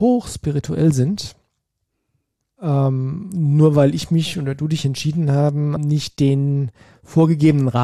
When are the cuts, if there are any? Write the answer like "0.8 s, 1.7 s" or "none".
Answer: 2.6 s, 5.8 s